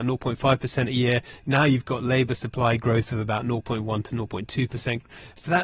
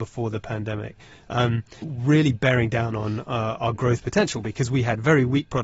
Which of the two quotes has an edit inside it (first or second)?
second